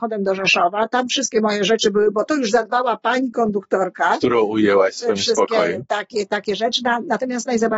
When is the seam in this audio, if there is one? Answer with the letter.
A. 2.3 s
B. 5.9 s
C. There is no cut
A